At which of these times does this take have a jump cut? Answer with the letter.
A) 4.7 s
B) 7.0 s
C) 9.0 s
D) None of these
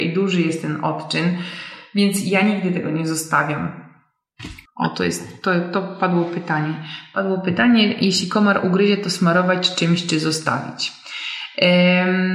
A